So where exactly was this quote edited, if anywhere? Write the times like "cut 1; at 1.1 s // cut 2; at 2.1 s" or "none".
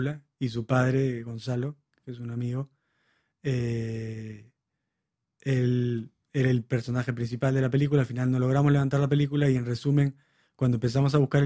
cut 1; at 6.2 s